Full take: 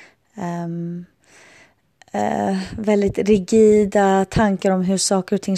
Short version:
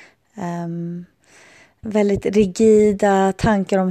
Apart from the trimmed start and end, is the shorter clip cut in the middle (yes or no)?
yes